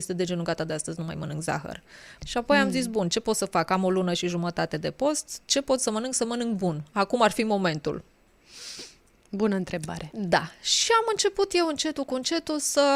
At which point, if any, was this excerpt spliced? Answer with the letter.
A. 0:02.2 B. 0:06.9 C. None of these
A